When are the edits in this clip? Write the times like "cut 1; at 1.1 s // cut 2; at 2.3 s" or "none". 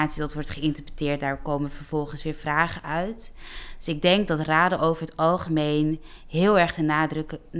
none